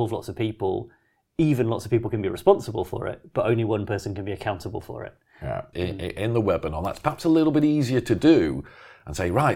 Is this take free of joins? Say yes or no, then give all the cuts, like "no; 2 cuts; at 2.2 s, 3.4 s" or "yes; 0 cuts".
no; 1 cut; at 5.7 s